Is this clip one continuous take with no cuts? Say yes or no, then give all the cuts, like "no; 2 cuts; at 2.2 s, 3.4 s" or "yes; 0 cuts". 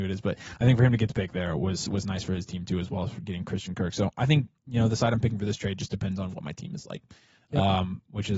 yes; 0 cuts